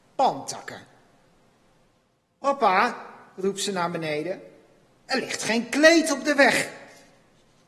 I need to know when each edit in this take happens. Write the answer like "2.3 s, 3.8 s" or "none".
none